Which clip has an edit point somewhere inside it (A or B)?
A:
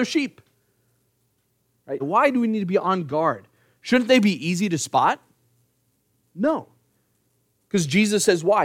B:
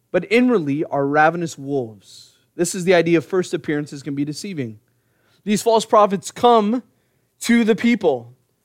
A